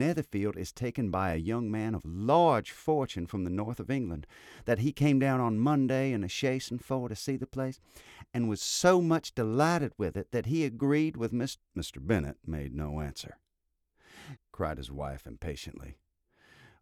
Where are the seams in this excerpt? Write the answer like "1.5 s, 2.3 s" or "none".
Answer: 11.6 s, 14.4 s